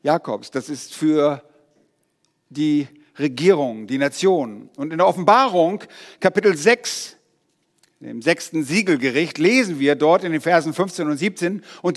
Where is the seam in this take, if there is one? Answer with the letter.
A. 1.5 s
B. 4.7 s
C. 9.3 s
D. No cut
D